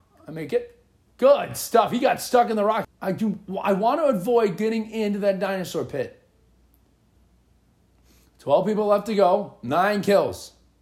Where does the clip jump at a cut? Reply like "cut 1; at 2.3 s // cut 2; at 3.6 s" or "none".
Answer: cut 1; at 1.1 s // cut 2; at 2.8 s

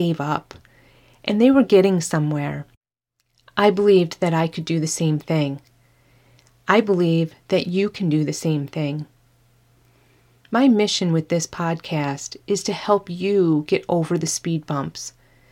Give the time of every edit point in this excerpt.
none

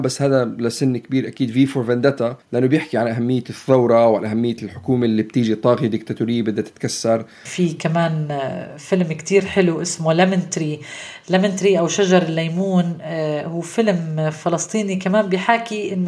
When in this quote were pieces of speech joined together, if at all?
cut 1; at 2.4 s

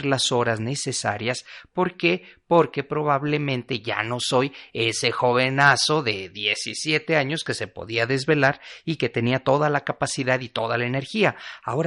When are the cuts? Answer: none

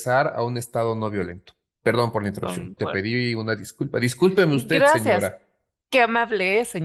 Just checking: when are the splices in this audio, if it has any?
cut 1; at 2.8 s

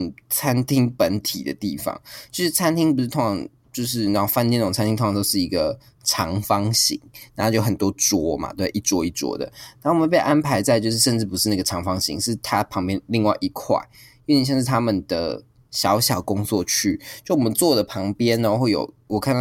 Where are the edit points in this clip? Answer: none

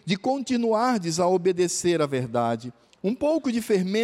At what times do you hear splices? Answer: cut 1; at 2.9 s

